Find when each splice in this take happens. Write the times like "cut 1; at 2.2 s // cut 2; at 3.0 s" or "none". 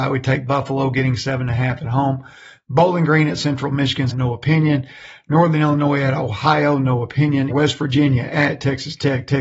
cut 1; at 4.1 s // cut 2; at 7.5 s